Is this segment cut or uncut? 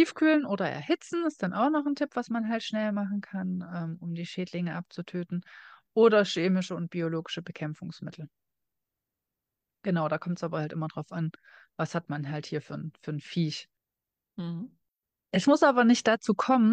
uncut